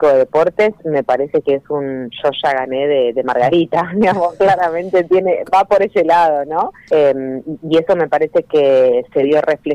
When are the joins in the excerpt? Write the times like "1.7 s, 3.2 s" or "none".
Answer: 6.9 s